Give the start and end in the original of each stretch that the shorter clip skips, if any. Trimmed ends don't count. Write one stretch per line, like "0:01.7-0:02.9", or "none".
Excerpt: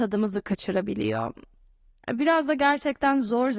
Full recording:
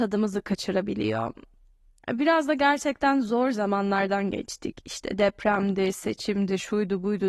none